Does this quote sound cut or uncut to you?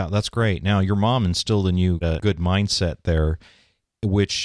cut